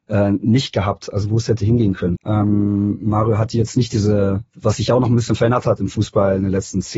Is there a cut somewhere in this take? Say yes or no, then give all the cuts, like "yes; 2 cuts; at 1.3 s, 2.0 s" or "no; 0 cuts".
yes; 2 cuts; at 2.2 s, 4.5 s